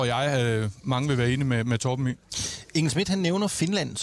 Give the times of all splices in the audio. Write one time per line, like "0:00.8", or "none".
none